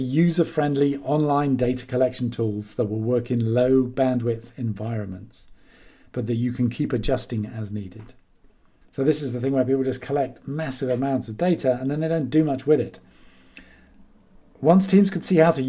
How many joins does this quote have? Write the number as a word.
one